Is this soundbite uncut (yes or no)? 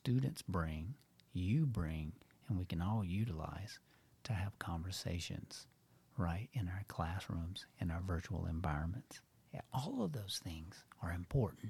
yes